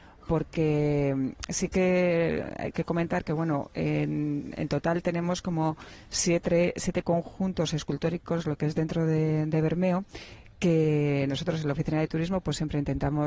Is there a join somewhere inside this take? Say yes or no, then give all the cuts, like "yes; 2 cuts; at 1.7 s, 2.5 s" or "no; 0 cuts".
no; 0 cuts